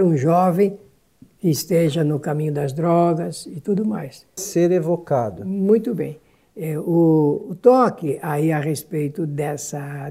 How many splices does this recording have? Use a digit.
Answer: 1